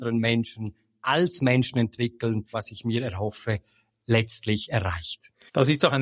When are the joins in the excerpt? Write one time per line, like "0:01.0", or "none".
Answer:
0:02.5